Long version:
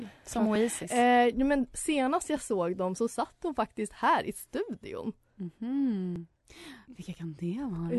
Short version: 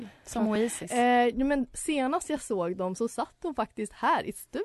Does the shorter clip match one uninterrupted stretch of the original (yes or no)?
yes